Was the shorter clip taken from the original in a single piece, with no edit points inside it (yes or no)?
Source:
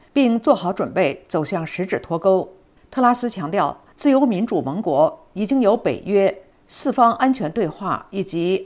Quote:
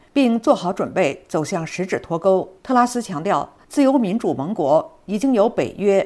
no